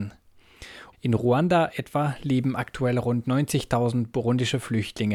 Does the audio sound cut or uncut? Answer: cut